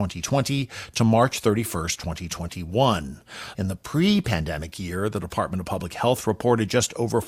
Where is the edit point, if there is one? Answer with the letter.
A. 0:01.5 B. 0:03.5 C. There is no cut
B